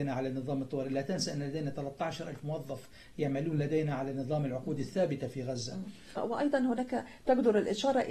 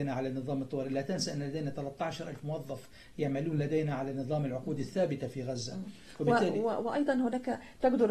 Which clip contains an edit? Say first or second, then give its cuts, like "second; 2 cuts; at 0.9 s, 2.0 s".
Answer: first; 1 cut; at 6.2 s